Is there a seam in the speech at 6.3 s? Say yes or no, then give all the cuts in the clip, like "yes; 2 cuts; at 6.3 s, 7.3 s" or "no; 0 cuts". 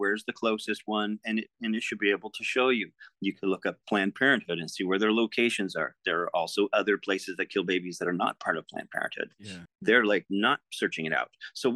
no; 1 cut; at 9.7 s